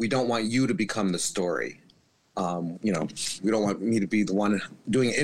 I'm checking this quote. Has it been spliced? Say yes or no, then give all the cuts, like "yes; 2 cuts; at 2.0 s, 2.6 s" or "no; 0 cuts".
yes; 1 cut; at 2.7 s